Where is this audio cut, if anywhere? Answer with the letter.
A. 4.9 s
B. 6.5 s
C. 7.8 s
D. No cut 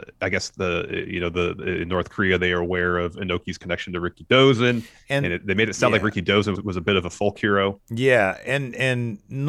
B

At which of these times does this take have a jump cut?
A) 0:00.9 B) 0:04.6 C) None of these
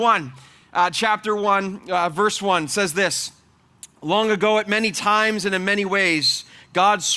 C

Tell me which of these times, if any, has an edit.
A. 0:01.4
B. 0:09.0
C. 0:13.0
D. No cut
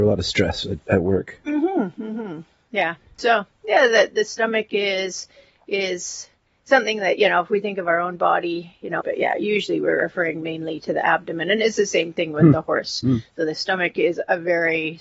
B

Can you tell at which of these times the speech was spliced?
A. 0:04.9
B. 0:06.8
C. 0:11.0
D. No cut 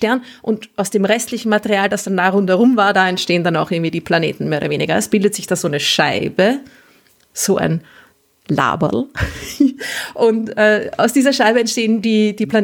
D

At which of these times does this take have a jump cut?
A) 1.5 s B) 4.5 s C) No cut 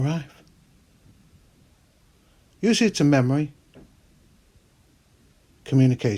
C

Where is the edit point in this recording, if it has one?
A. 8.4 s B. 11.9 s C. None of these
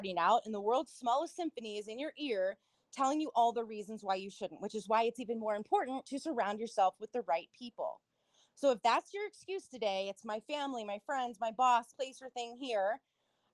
B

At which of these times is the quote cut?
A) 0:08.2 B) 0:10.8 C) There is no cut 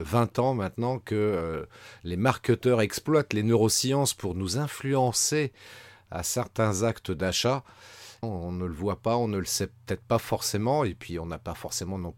A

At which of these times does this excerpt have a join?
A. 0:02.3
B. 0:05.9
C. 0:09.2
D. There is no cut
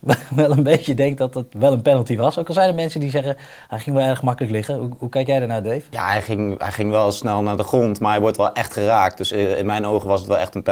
D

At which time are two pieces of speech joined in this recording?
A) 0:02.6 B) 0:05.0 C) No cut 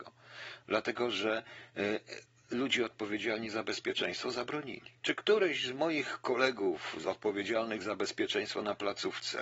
B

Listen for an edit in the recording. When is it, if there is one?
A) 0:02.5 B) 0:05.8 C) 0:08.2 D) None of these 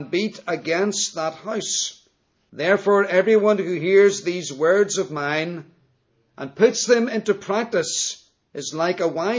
A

